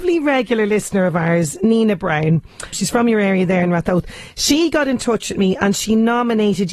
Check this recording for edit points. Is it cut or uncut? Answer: cut